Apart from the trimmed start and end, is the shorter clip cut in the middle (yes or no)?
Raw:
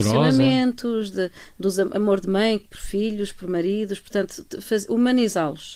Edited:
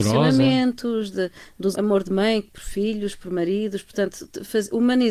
yes